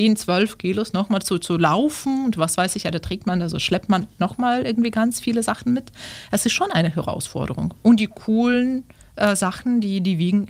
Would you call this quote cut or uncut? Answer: uncut